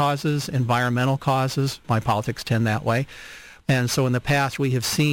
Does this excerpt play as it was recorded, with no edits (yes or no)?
no